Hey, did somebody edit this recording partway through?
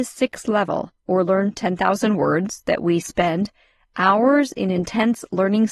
yes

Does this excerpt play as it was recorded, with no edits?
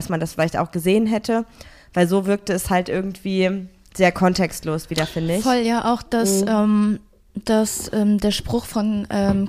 yes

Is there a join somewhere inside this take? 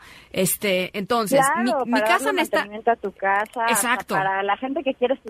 no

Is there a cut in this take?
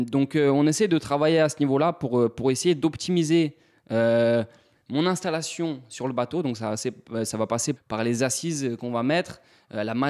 yes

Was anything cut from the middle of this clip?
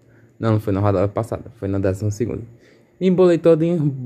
no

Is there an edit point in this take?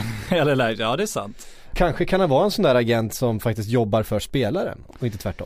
yes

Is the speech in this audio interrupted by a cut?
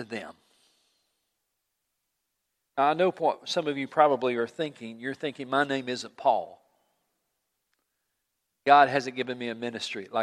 no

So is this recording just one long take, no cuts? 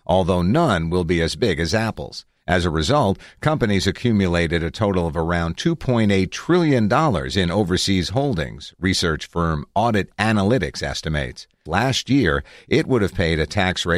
no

